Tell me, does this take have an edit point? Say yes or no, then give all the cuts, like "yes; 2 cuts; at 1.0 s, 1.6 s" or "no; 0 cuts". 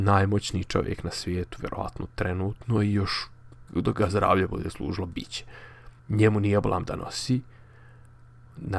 yes; 2 cuts; at 3.7 s, 6.0 s